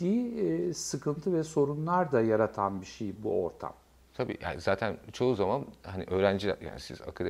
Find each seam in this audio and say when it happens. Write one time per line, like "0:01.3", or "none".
0:03.2